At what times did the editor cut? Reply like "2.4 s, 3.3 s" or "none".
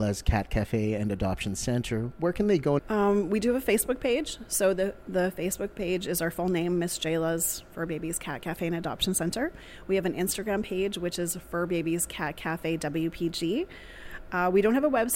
2.8 s